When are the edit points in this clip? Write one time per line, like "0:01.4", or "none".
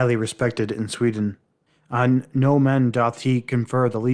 0:01.7